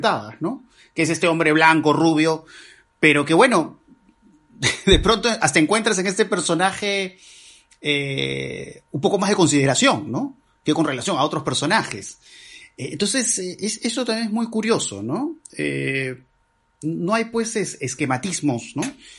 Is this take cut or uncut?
uncut